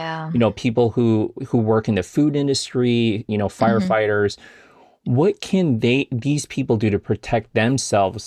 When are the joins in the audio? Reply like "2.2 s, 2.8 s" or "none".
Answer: 3.3 s